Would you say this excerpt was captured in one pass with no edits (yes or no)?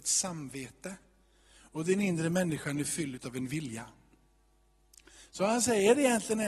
yes